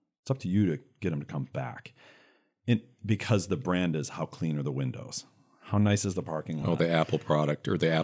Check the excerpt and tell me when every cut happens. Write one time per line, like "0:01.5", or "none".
none

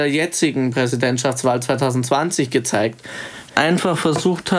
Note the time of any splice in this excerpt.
0:03.5

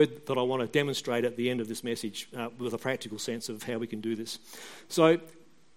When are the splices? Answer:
none

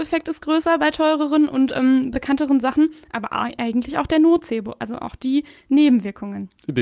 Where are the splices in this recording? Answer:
none

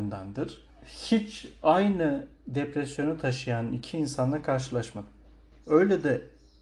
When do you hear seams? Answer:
0:05.6

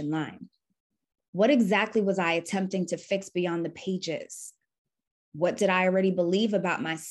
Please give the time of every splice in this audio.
0:01.2

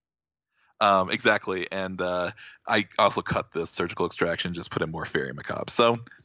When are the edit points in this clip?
none

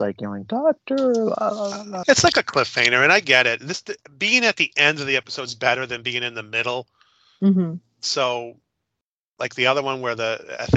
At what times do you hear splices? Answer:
0:02.0

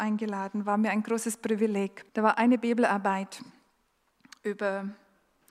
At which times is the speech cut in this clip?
0:02.1

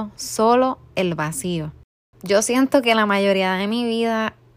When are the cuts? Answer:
0:02.1

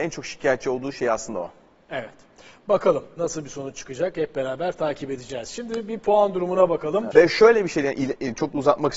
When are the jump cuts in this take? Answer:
0:07.1

